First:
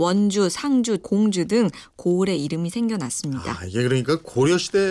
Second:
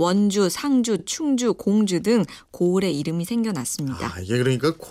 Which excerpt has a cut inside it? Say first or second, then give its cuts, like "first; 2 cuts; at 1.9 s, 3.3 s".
first; 1 cut; at 1.0 s